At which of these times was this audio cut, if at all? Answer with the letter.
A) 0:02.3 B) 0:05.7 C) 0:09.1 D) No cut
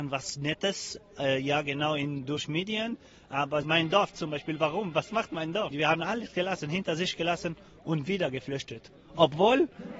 B